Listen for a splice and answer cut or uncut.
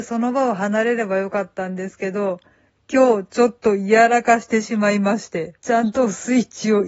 cut